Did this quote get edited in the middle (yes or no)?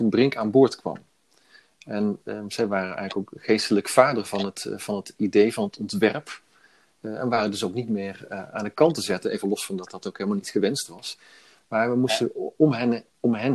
no